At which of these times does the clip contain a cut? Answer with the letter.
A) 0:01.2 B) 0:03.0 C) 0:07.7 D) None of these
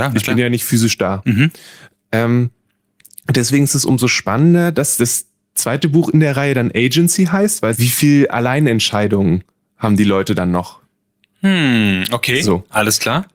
C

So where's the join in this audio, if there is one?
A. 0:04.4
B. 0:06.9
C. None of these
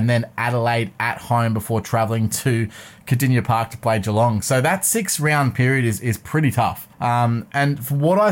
B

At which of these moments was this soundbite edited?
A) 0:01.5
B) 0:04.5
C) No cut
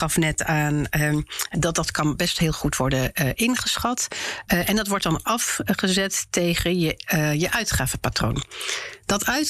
A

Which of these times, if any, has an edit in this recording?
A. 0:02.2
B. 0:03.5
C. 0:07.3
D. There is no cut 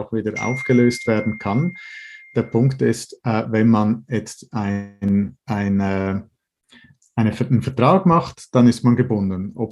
D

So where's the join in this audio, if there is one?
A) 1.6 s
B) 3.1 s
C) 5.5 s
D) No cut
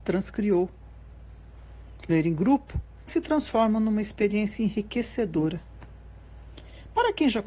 B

